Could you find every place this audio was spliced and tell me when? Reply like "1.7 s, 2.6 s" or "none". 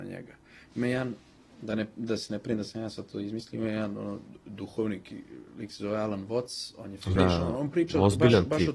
7.2 s